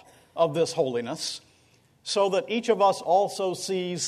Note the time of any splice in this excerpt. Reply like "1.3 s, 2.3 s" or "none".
none